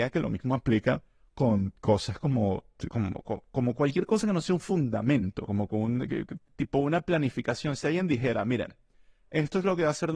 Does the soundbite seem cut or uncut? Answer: uncut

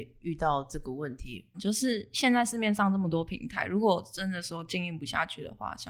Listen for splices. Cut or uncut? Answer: cut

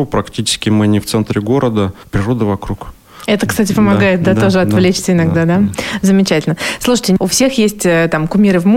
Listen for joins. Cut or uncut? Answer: uncut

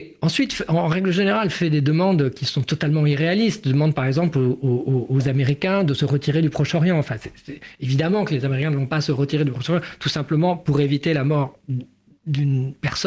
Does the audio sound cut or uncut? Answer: uncut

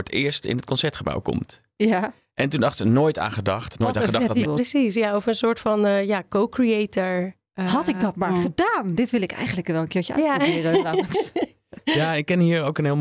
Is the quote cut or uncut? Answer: cut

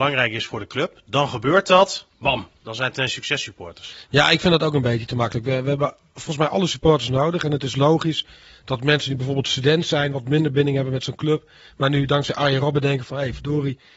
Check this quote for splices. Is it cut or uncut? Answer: uncut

